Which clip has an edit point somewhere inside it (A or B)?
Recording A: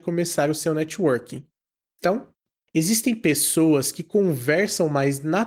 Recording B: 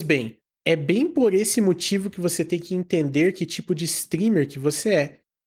A